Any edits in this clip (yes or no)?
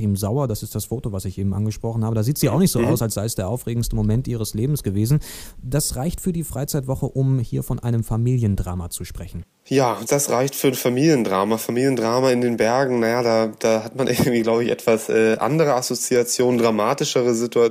no